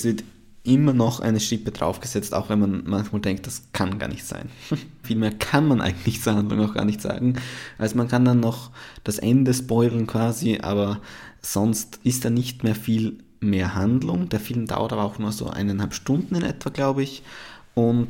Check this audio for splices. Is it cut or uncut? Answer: cut